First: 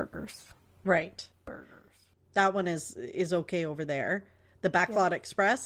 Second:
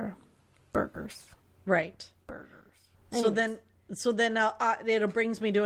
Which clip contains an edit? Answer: first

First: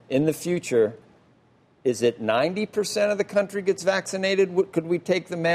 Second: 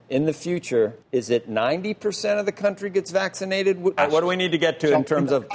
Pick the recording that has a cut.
second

